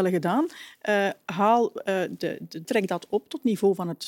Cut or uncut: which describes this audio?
cut